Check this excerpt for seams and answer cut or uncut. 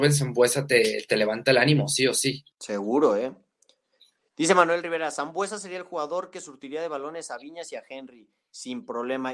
cut